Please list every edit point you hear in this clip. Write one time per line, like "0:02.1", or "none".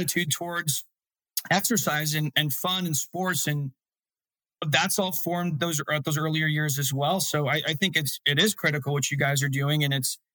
none